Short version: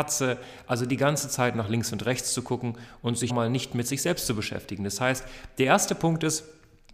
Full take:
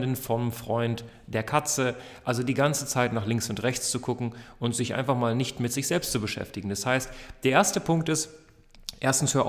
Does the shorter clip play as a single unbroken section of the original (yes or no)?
no